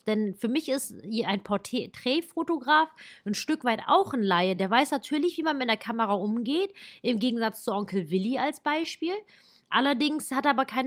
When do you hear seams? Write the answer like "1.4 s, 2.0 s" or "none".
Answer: none

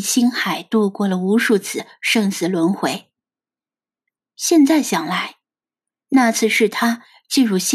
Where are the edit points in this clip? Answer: none

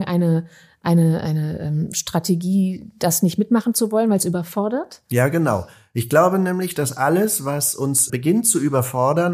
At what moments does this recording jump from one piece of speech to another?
8.1 s

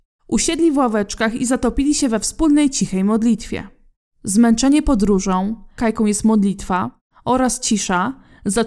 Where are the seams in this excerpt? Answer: 5.8 s

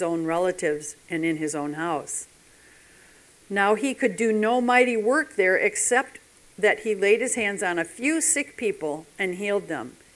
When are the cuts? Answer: none

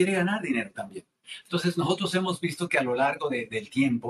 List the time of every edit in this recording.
1.4 s

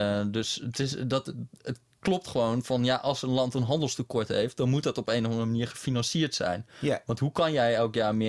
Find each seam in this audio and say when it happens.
none

